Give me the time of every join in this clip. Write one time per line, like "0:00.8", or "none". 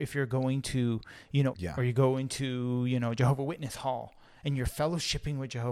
0:01.5